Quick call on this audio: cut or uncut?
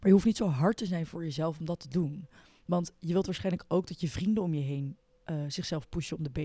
uncut